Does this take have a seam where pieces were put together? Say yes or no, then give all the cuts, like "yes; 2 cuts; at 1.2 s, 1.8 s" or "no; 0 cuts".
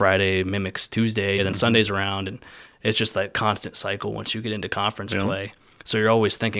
yes; 1 cut; at 1.4 s